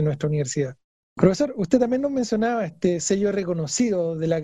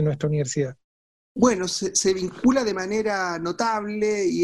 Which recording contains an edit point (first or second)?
first